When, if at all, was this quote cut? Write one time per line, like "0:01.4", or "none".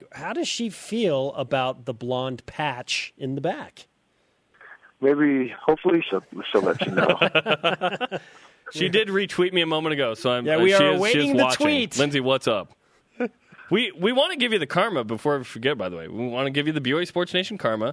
0:05.0
0:06.0